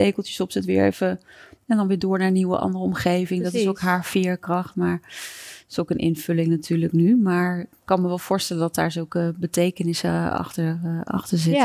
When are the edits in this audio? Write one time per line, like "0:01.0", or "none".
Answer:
none